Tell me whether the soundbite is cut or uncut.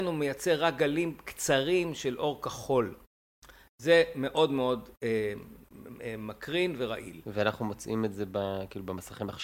uncut